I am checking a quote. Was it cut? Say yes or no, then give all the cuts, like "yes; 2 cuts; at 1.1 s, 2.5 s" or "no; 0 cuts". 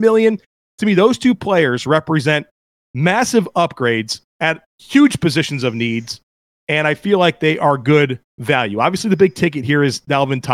yes; 1 cut; at 4.3 s